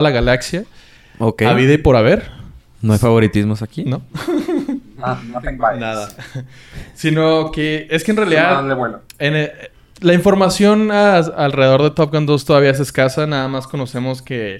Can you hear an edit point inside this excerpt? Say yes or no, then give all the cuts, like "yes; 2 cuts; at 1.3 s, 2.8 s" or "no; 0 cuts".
no; 0 cuts